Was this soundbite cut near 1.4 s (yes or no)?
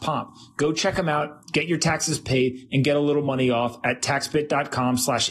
no